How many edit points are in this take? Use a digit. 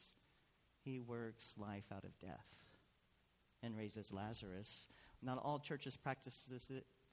1